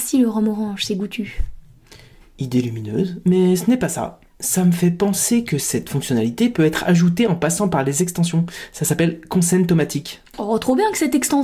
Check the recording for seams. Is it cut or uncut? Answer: uncut